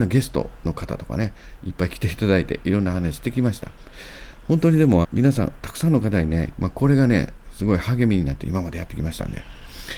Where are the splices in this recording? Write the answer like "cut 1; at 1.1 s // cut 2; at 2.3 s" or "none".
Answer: cut 1; at 5.0 s // cut 2; at 6.5 s